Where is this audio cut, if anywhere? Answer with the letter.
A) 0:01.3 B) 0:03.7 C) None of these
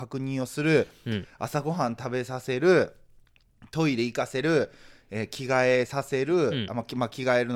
C